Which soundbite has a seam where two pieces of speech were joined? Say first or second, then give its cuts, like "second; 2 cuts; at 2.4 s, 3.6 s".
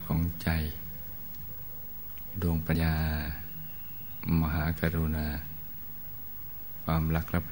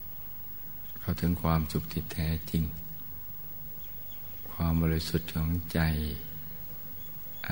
first; 1 cut; at 2.8 s